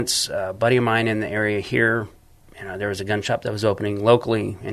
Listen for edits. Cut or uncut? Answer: uncut